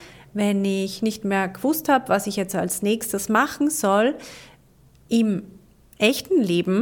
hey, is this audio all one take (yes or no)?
yes